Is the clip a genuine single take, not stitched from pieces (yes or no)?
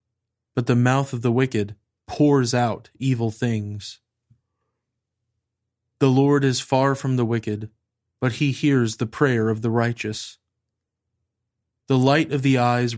yes